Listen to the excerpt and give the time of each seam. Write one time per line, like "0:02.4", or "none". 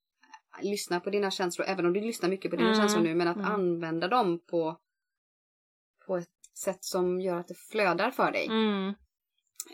0:06.4